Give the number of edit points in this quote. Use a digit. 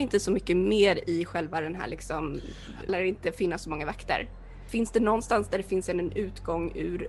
1